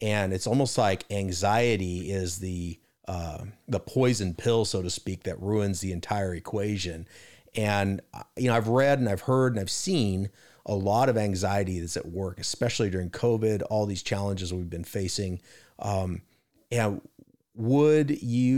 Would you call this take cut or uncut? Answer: uncut